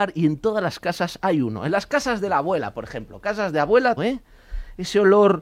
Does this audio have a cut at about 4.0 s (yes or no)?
yes